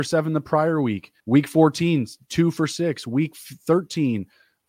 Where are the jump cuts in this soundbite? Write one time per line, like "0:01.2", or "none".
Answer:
0:01.2